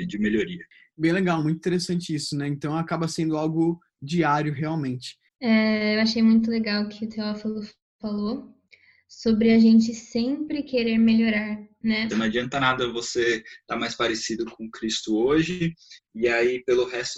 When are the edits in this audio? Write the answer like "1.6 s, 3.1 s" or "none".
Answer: 5.3 s, 12.1 s